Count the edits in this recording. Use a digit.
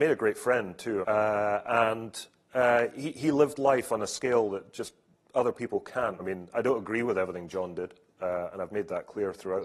2